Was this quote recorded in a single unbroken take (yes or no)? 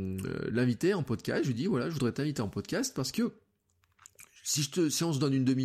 yes